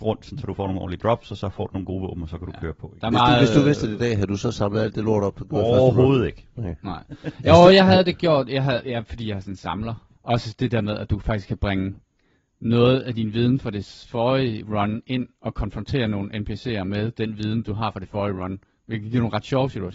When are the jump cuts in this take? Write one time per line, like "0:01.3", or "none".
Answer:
0:10.2

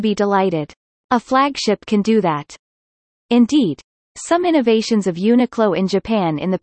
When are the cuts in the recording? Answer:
0:03.2

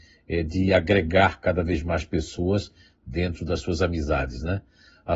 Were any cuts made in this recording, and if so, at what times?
none

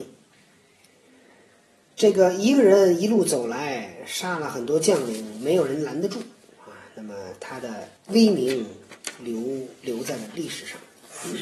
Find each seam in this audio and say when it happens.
0:08.0

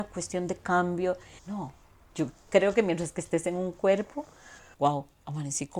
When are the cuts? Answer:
0:01.4
0:04.7

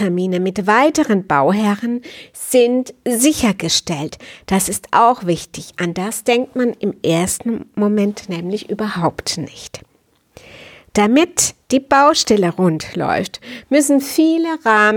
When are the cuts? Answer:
none

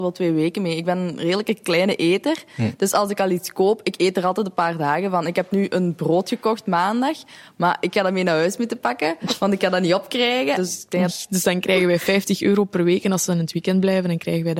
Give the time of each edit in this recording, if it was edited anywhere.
0:11.1

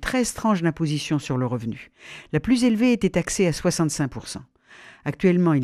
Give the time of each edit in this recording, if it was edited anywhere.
none

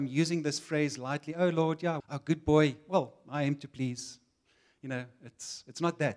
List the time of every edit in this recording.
0:02.0

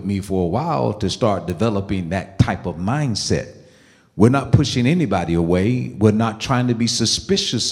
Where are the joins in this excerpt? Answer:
none

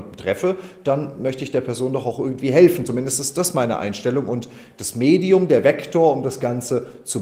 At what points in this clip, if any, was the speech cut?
none

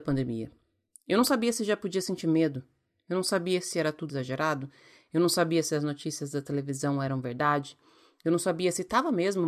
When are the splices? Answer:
0:04.1

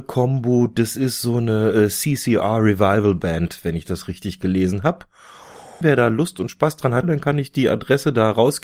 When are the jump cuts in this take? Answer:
0:05.8
0:07.0

